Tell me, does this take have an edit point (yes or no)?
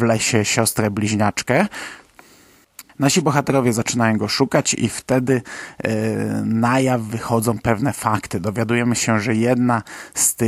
yes